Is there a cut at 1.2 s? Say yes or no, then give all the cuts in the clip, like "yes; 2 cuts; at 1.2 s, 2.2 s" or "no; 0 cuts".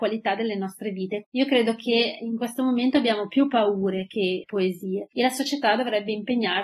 yes; 1 cut; at 1.2 s